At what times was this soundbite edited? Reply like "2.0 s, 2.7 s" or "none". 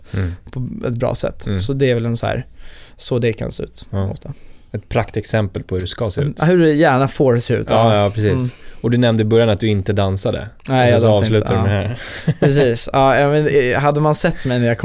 none

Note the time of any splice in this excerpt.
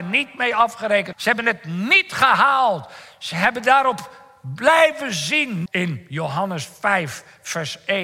1.1 s, 5.7 s

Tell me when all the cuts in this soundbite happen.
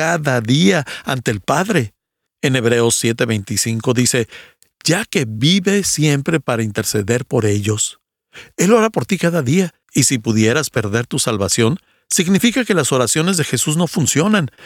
2.3 s, 9.8 s

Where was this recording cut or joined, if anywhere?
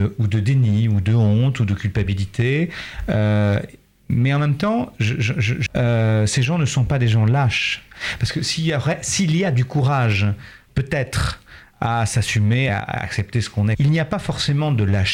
5.7 s, 12.7 s, 13.7 s

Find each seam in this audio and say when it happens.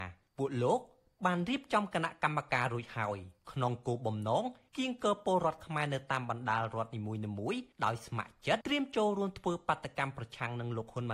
8.6 s

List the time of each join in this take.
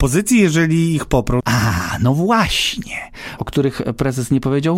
1.4 s, 3.4 s

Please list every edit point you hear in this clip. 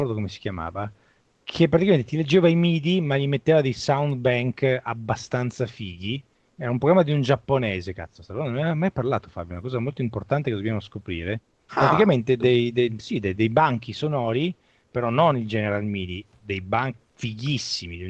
13.4 s

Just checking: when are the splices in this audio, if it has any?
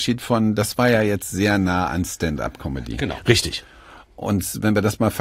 none

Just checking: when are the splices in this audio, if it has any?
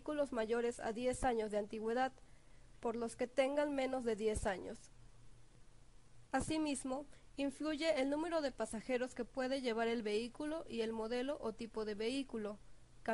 none

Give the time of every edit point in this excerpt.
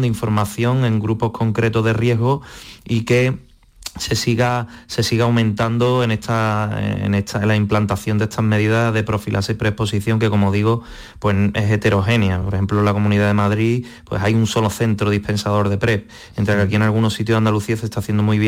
none

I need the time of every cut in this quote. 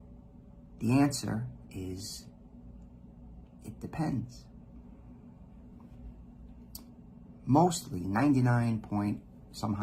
1.6 s

